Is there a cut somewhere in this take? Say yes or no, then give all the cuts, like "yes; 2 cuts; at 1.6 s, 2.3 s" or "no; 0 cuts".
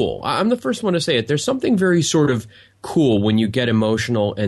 no; 0 cuts